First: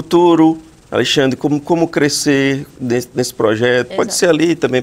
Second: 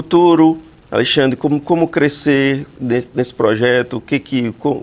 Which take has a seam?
first; 1 cut; at 3.9 s

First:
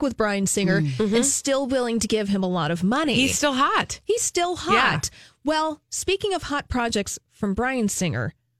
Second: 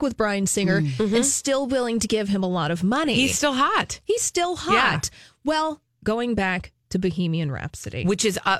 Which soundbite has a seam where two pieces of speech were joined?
second; 1 cut; at 5.9 s

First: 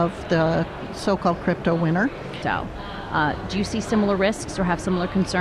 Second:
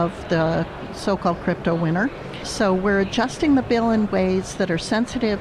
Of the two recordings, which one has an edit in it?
first; 1 cut; at 2.4 s

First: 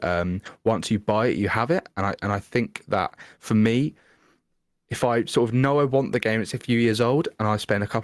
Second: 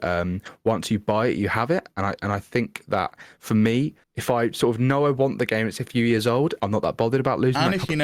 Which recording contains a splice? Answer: second; 2 cuts; at 4.0 s, 6.6 s

